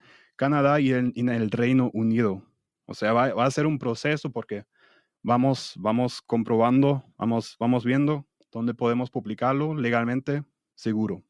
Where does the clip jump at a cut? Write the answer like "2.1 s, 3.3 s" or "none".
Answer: none